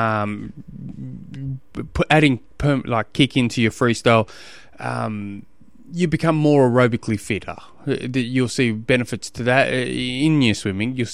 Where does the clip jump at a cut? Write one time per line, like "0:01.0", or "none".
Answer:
none

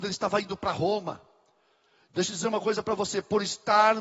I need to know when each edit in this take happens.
none

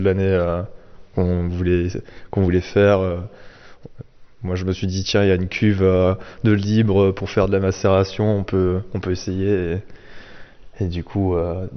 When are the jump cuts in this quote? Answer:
none

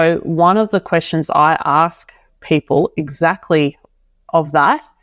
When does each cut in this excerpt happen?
none

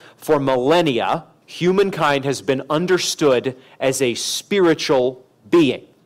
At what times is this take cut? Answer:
0:01.4

